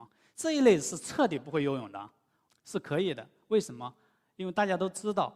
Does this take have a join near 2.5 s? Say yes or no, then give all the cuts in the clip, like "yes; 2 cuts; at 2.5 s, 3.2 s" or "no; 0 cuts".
yes; 1 cut; at 2.5 s